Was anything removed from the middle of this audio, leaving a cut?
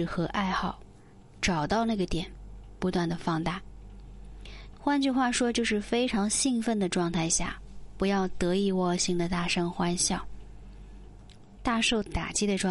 yes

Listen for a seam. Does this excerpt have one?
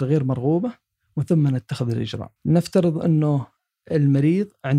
yes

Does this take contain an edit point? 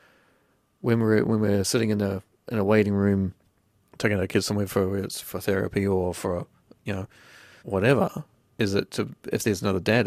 yes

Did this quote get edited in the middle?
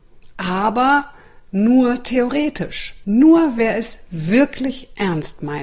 yes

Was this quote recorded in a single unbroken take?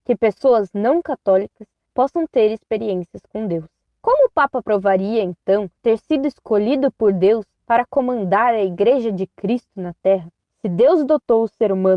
no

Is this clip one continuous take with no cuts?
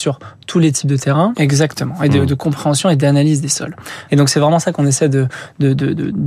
no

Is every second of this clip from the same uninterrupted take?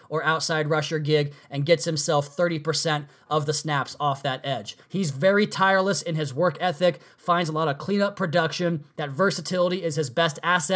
no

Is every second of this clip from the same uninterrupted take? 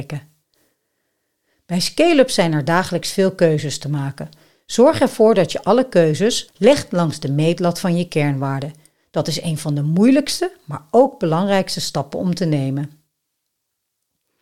no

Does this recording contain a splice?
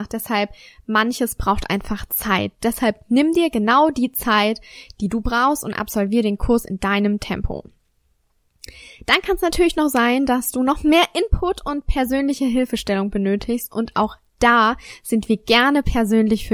no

